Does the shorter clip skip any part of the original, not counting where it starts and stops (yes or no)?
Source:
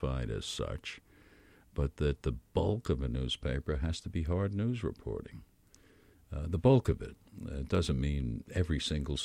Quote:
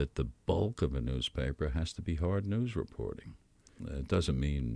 yes